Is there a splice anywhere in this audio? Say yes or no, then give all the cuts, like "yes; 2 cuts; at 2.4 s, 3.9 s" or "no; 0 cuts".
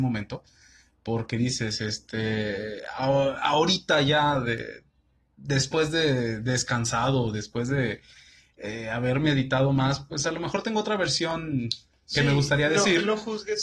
no; 0 cuts